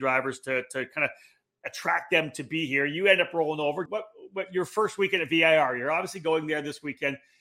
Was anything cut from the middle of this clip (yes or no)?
yes